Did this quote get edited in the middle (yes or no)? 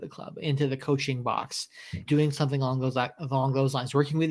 yes